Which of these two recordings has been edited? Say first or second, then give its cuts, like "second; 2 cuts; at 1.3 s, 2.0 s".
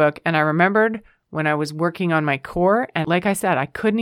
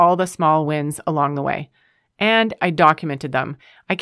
second; 1 cut; at 2.6 s